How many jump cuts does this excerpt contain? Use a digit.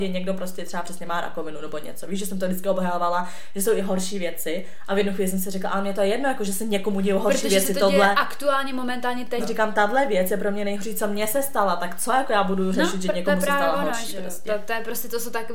1